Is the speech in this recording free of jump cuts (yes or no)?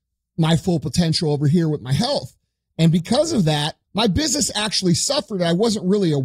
no